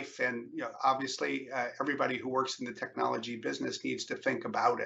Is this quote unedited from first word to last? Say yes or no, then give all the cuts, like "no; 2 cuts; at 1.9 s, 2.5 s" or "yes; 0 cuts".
yes; 0 cuts